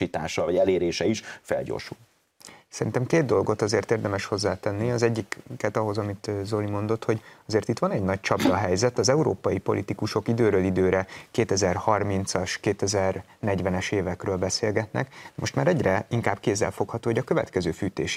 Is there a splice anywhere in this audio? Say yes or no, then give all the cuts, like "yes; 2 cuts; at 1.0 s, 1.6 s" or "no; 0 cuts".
no; 0 cuts